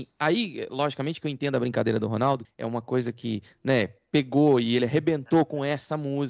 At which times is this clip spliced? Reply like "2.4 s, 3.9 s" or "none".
2.4 s

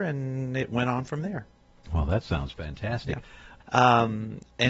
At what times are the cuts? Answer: 3.6 s

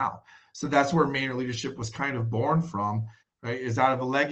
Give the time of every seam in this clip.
3.2 s

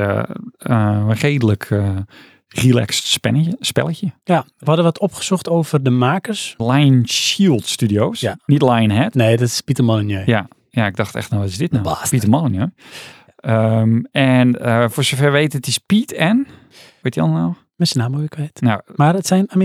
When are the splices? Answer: 6.6 s

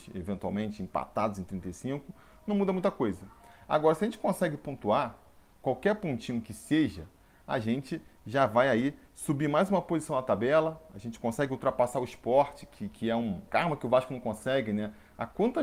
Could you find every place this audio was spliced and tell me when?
12.9 s

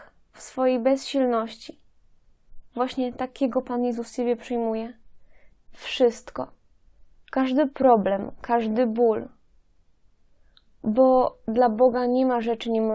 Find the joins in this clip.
5.5 s

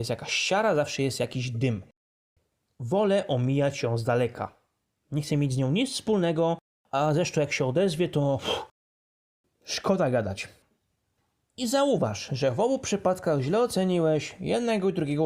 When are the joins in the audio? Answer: none

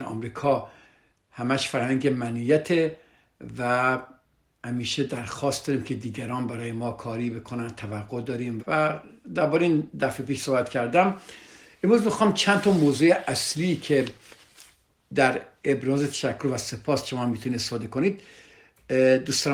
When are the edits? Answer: 8.6 s

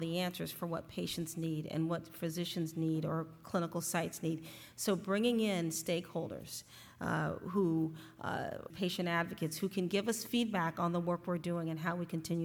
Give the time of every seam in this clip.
8.7 s

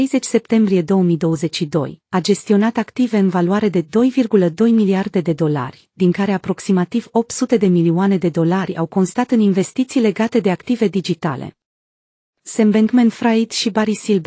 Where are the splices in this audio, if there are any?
none

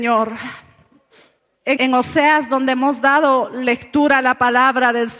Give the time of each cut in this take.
1.8 s

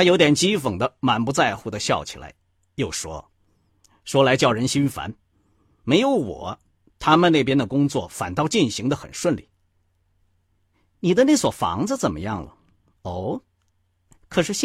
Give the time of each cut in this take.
13.0 s

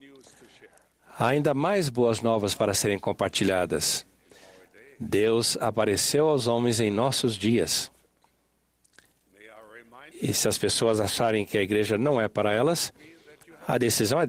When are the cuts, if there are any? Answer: 10.1 s

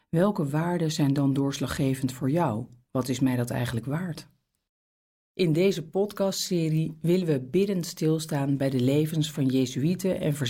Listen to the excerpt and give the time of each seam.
2.9 s, 5.2 s

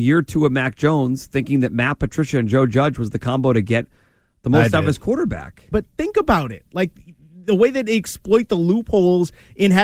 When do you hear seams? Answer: 5.7 s

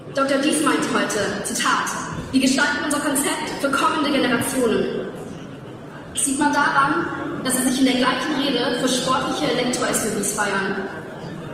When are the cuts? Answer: 6.1 s

